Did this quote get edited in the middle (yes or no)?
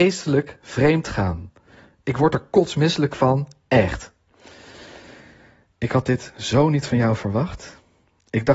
no